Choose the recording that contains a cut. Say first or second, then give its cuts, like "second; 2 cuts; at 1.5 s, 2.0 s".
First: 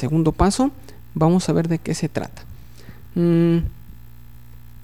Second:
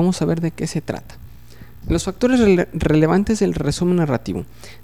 second; 1 cut; at 1.8 s